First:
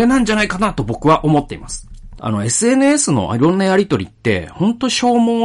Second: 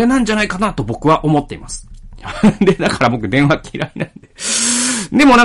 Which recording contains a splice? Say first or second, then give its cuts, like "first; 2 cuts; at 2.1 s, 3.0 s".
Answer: first; 1 cut; at 2.2 s